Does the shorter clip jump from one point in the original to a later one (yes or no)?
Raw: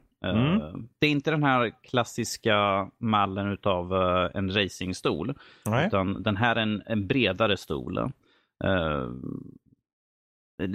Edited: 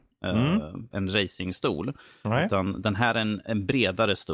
yes